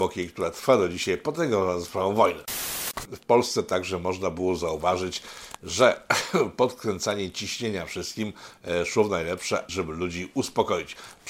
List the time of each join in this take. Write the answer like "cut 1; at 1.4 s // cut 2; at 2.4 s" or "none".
cut 1; at 3.1 s // cut 2; at 9.7 s